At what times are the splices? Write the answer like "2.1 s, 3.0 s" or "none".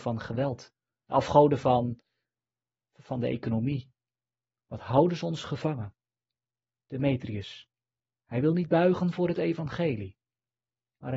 none